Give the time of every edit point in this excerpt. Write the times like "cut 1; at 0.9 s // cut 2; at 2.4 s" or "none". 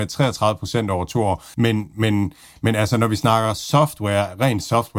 cut 1; at 1.5 s